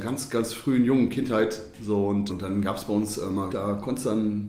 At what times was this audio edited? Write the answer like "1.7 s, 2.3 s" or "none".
2.3 s, 3.5 s